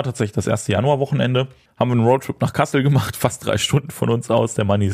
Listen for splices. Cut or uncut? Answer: uncut